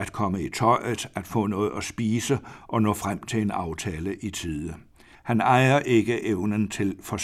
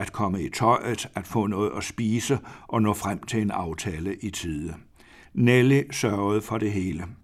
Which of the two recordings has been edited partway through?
first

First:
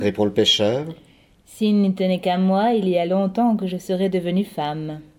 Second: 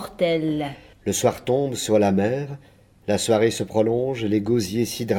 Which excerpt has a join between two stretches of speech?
second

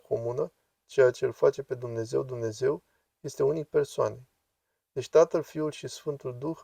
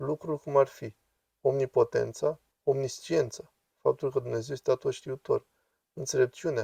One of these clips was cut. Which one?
second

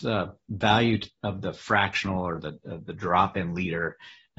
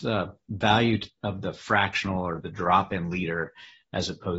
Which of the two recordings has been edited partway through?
second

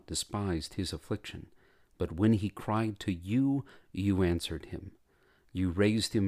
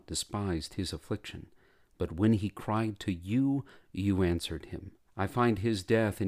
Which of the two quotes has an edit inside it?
second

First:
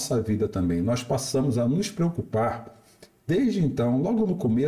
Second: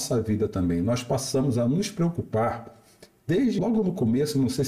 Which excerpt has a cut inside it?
second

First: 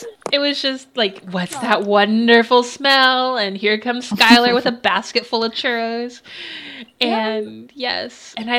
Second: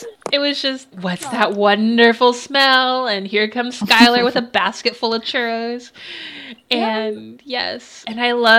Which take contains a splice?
second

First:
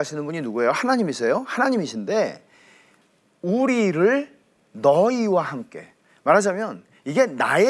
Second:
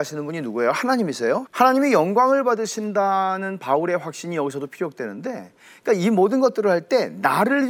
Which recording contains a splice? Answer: second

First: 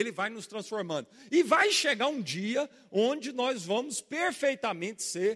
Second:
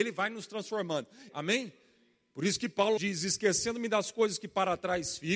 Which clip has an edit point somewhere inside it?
second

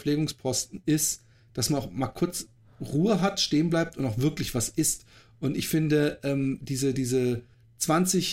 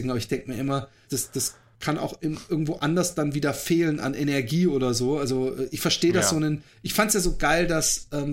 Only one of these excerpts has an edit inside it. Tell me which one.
second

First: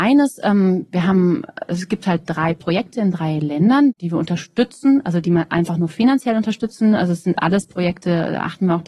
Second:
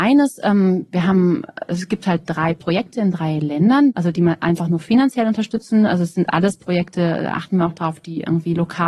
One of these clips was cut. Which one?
second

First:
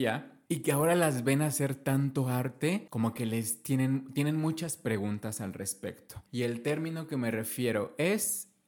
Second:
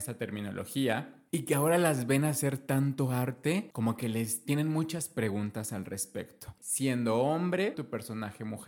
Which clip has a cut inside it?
second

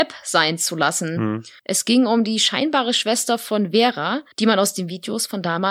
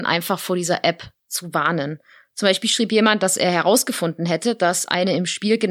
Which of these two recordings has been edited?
first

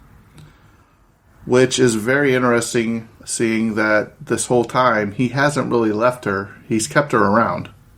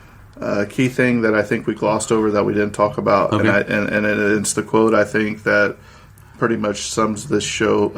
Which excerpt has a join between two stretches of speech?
first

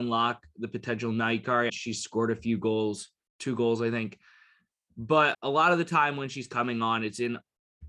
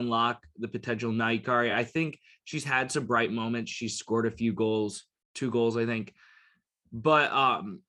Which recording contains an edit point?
first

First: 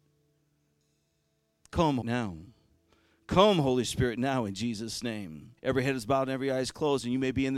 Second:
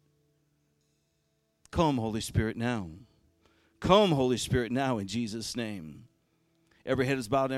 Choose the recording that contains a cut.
first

